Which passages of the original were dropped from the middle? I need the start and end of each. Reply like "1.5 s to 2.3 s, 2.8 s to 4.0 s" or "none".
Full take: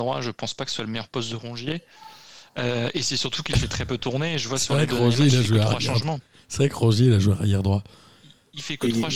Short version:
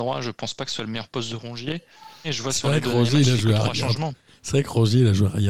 2.2 s to 4.3 s